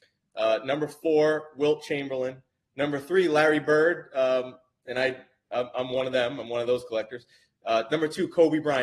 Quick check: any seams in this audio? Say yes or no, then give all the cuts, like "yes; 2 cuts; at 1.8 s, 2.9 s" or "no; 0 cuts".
no; 0 cuts